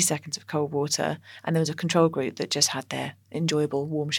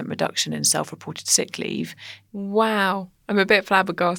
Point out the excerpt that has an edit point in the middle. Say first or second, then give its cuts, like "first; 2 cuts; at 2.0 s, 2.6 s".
second; 1 cut; at 2.3 s